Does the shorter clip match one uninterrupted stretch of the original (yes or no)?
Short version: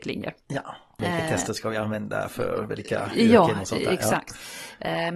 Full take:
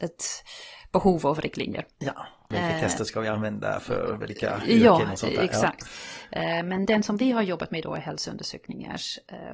yes